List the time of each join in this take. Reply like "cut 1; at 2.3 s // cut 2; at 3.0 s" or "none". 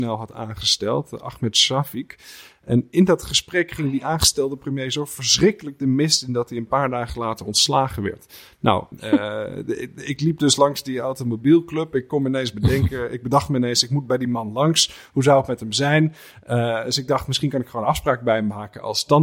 cut 1; at 8.9 s